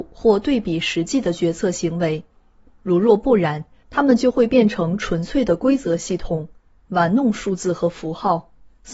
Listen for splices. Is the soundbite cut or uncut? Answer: uncut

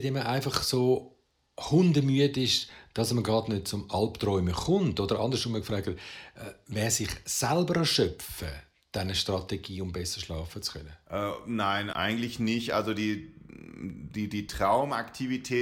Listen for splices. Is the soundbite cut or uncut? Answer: cut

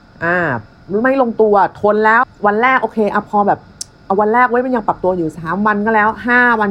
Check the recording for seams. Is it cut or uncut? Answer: cut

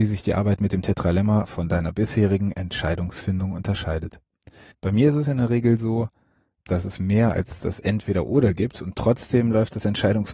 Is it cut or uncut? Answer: cut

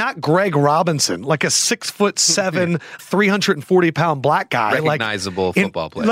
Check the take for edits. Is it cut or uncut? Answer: cut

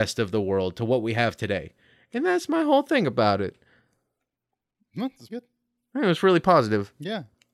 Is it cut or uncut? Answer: cut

